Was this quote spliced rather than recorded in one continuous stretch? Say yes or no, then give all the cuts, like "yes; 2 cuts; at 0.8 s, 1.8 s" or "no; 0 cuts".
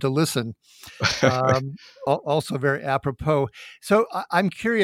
no; 0 cuts